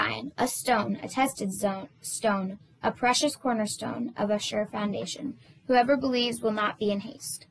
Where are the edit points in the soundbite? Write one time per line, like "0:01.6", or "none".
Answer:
none